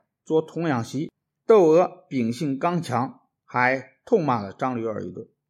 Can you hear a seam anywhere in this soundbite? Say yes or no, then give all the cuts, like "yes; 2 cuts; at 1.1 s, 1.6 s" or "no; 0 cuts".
yes; 2 cuts; at 1.4 s, 3.4 s